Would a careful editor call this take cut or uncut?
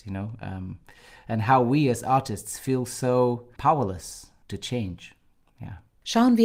cut